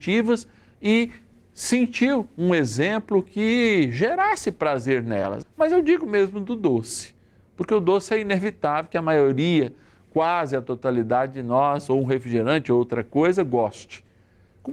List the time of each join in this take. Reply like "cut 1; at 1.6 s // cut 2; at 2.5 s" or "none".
cut 1; at 5.4 s